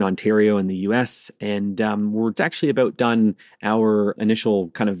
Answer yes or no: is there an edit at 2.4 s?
yes